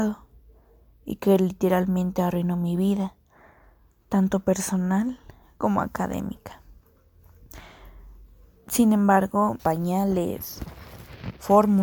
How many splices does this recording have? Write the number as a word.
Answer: one